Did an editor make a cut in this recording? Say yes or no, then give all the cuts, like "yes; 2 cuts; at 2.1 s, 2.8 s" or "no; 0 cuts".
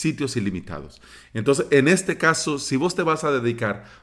no; 0 cuts